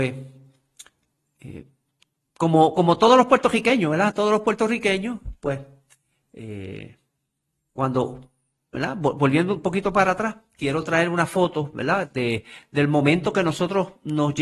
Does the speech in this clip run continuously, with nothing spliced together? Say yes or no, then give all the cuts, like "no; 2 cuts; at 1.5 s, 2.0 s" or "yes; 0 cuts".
yes; 0 cuts